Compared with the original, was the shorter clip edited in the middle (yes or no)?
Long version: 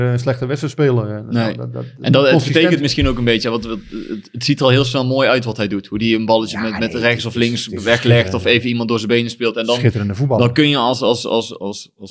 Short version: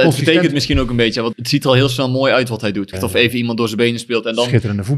yes